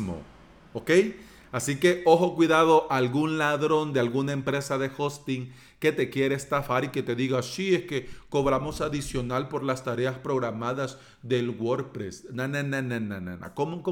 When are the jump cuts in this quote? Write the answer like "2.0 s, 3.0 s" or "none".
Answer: none